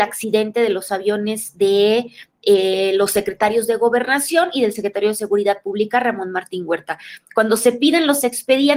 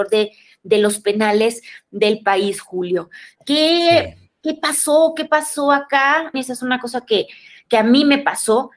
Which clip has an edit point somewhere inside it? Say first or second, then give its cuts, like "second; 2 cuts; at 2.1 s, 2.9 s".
second; 1 cut; at 6.3 s